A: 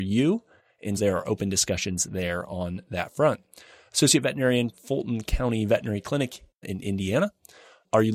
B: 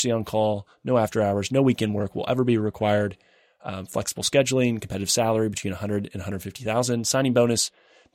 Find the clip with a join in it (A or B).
A